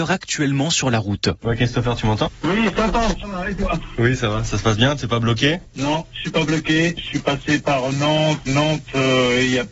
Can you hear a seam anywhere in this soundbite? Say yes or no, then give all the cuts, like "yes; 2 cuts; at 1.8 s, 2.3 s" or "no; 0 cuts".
yes; 1 cut; at 8.5 s